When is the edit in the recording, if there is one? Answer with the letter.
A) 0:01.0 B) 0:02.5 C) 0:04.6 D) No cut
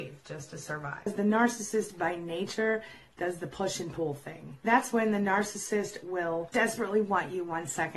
C